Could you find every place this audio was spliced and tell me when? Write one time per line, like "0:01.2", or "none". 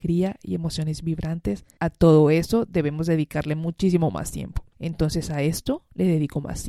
0:04.7